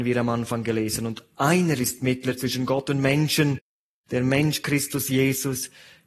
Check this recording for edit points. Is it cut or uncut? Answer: uncut